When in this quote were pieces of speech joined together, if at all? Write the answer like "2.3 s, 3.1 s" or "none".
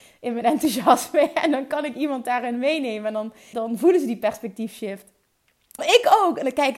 3.5 s, 5.8 s